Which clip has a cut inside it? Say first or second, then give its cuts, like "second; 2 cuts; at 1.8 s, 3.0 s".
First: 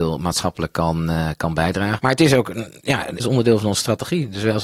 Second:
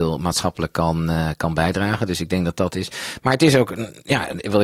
first; 2 cuts; at 2.0 s, 3.2 s